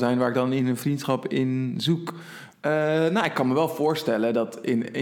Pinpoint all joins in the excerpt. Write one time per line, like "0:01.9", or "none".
0:02.5

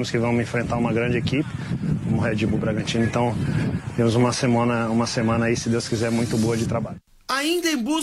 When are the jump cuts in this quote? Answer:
none

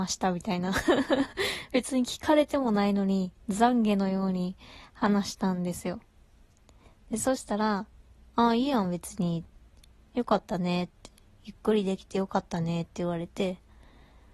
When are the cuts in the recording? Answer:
none

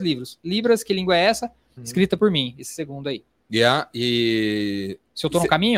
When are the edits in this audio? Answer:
0:01.8
0:03.4

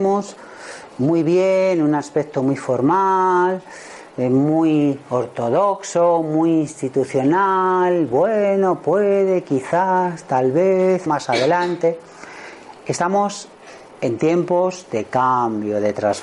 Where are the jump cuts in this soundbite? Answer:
0:11.1

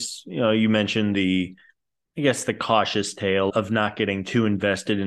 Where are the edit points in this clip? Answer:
0:03.5

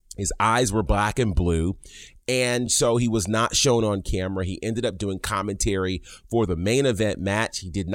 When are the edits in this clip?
none

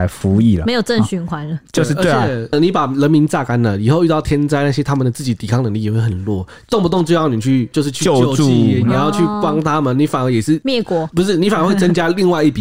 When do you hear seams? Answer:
0:02.5

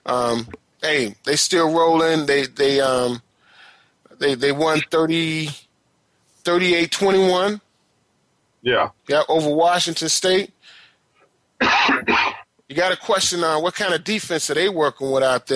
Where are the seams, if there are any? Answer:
0:09.0

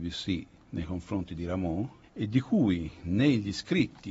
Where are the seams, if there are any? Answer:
0:02.0

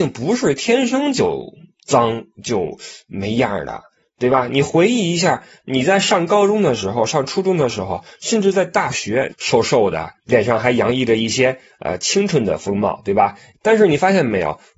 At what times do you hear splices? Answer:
0:09.3
0:13.5

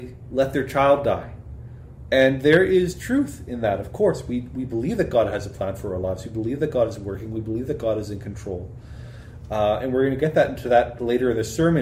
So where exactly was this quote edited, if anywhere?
0:02.1

